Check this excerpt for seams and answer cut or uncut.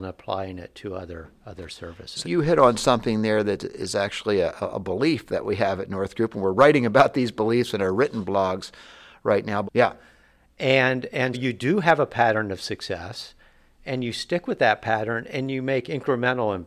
cut